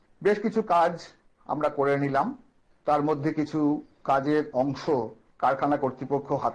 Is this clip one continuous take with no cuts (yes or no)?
yes